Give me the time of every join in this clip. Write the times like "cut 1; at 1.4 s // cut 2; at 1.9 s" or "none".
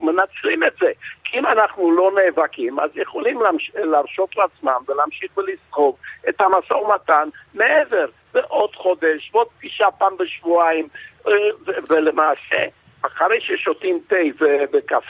cut 1; at 9.3 s